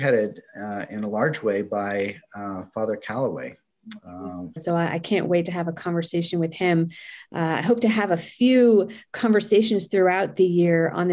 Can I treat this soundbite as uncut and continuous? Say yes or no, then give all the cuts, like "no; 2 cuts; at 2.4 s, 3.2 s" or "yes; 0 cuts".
no; 1 cut; at 4.6 s